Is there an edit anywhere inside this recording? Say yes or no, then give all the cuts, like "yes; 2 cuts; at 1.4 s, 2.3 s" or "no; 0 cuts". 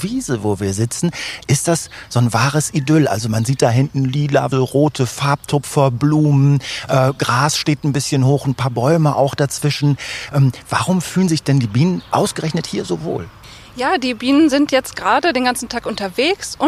yes; 1 cut; at 4.5 s